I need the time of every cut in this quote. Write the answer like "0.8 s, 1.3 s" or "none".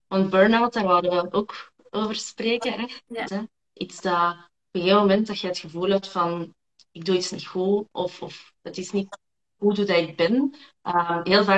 3.2 s

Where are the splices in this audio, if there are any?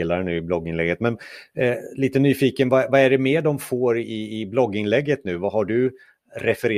none

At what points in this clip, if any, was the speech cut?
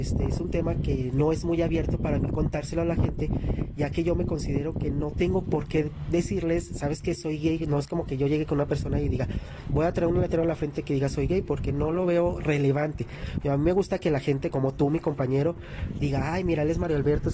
13.4 s, 14.5 s, 16.0 s

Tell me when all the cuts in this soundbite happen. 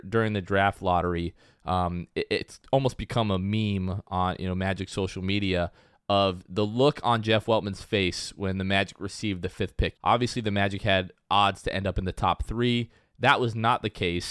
9.9 s

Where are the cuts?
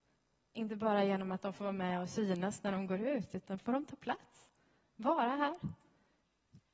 none

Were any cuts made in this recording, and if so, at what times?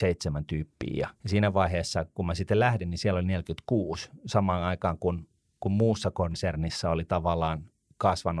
1.2 s

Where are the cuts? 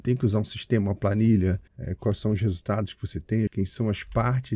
1.7 s, 3.5 s

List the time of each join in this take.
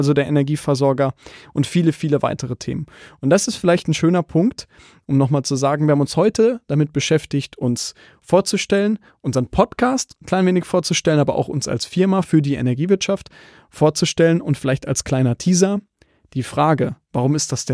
none

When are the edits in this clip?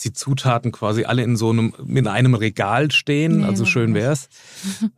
none

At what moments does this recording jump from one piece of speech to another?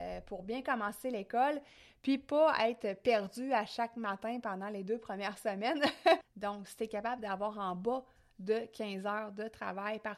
6.2 s

